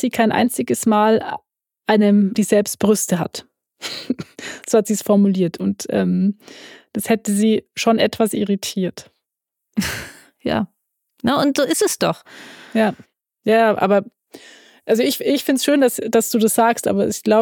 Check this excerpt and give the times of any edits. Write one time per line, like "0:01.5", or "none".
0:02.4